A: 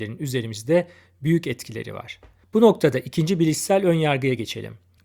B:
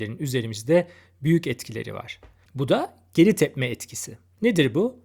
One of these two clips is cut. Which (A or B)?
B